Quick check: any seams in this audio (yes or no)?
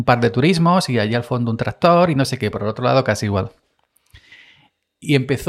no